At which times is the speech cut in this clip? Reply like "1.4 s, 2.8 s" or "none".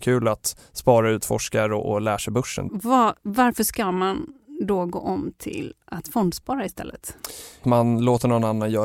2.7 s, 7.6 s